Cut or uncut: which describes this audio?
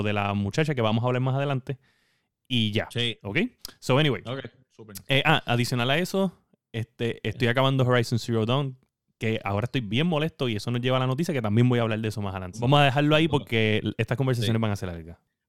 cut